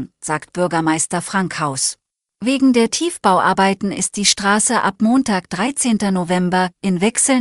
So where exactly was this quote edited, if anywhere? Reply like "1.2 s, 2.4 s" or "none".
2.2 s